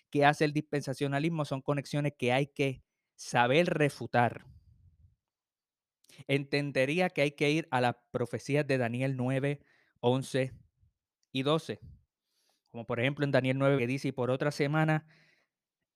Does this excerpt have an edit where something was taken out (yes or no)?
yes